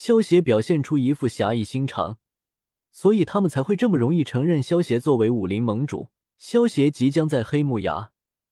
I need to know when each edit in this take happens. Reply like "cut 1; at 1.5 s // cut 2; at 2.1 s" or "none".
cut 1; at 6.2 s